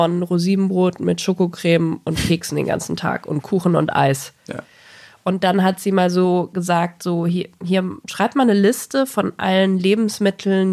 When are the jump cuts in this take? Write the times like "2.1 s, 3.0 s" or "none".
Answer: none